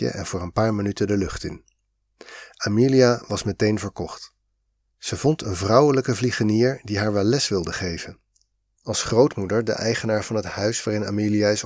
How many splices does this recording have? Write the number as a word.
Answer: one